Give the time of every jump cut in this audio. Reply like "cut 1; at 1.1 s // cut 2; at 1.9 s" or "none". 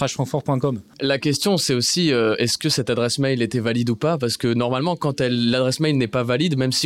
cut 1; at 0.9 s